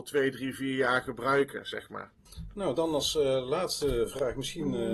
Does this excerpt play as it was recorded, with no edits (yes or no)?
yes